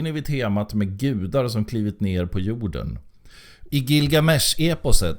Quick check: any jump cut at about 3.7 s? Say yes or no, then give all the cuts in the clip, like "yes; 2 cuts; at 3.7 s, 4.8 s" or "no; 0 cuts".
yes; 1 cut; at 3.7 s